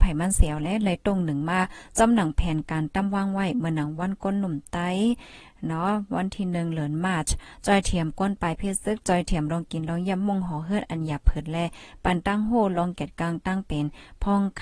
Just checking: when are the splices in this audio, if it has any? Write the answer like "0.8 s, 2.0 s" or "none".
none